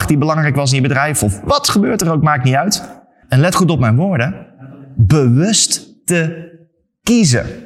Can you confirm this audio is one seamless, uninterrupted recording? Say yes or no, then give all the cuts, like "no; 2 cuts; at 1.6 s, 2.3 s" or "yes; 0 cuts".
no; 1 cut; at 3.2 s